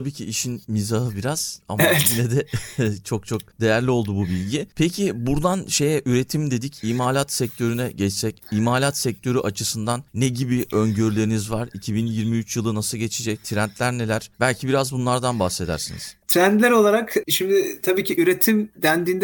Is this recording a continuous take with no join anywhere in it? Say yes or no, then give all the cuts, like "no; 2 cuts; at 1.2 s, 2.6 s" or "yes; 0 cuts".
yes; 0 cuts